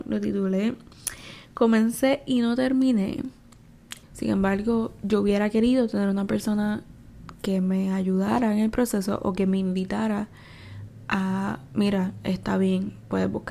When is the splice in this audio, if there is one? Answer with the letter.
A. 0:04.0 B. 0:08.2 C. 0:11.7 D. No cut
A